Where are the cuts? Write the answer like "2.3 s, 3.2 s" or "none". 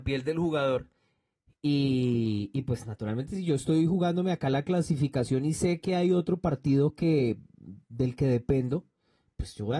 none

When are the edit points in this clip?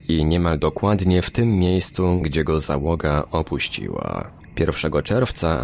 4.4 s

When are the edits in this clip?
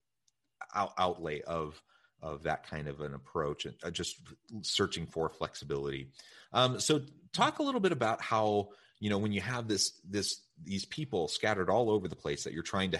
none

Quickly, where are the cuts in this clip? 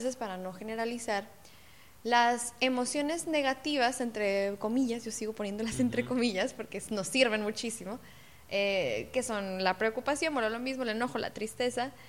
none

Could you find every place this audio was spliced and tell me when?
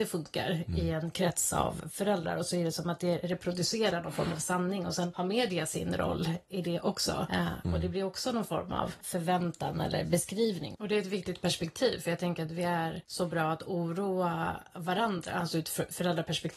7.6 s, 10.7 s

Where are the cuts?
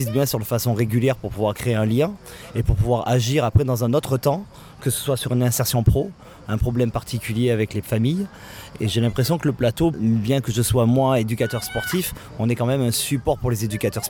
9.9 s

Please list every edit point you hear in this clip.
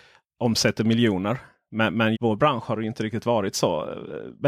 2.1 s

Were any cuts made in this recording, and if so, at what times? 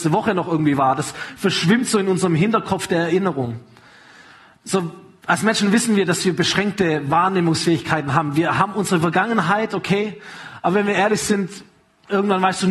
4.5 s

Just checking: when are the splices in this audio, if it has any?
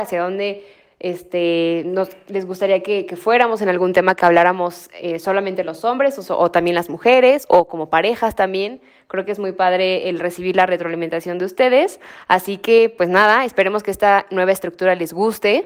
none

